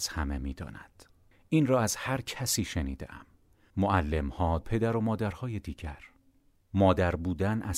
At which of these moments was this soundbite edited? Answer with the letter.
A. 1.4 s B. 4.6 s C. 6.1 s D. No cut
B